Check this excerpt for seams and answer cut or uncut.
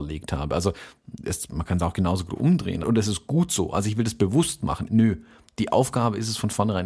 cut